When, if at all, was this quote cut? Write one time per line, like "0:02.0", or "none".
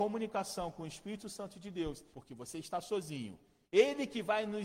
0:02.1
0:03.6